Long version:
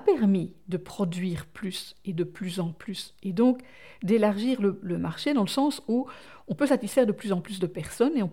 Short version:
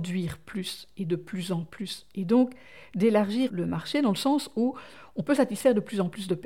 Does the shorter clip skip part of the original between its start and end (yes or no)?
yes